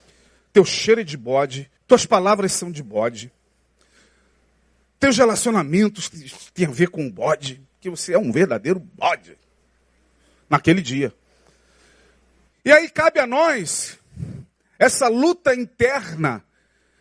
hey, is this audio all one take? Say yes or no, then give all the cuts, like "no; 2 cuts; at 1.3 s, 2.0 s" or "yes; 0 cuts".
no; 1 cut; at 1.8 s